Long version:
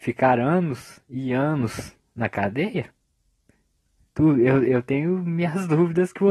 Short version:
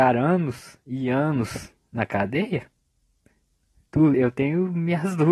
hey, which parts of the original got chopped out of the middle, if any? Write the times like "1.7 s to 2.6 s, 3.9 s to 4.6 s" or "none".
4.4 s to 4.6 s